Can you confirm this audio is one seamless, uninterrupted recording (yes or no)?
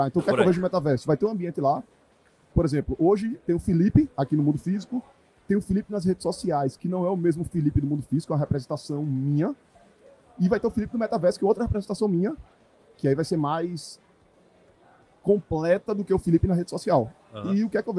no